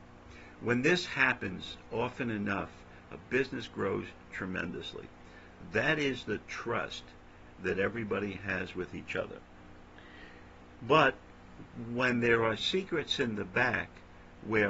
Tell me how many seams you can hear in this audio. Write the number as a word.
zero